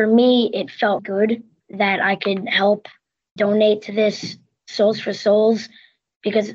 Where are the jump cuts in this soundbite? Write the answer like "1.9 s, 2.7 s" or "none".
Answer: 1.0 s, 3.4 s